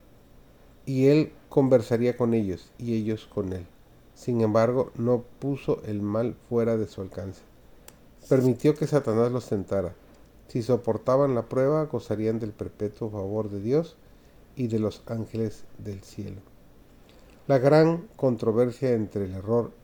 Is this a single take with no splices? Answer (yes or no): no